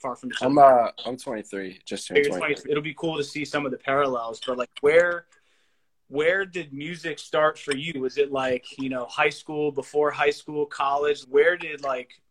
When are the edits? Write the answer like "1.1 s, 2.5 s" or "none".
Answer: 2.6 s, 11.2 s